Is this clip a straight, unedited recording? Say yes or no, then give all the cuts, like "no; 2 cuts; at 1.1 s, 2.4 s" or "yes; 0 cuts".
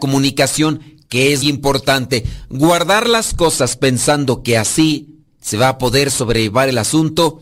no; 1 cut; at 1.4 s